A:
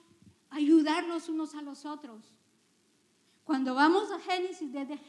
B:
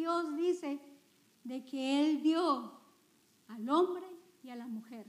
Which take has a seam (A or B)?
A